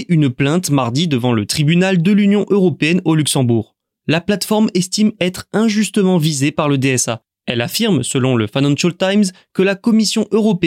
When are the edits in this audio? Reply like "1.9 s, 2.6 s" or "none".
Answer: none